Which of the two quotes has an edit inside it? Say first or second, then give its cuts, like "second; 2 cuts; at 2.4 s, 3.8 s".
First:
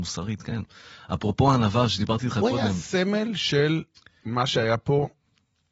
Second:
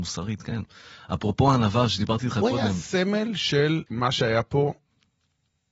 second; 1 cut; at 3.9 s